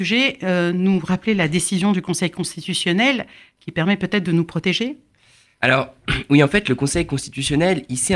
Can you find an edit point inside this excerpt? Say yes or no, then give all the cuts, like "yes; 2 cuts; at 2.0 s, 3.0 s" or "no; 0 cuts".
no; 0 cuts